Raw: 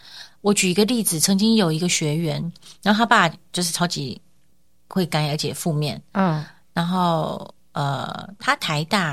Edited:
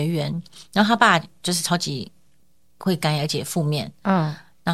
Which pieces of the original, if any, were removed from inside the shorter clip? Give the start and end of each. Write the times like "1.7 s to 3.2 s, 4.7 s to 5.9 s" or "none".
none